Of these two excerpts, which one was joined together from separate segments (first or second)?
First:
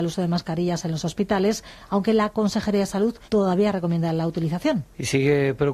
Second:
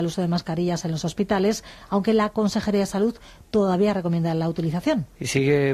first